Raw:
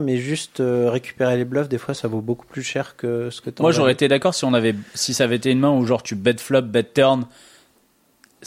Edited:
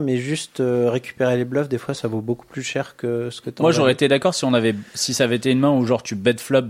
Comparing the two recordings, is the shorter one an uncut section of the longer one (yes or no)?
yes